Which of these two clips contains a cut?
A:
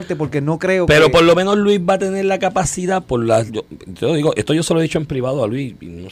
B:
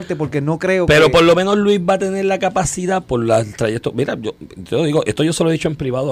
A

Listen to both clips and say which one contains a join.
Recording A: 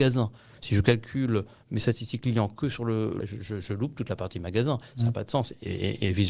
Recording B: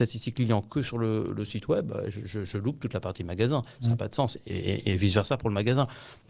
A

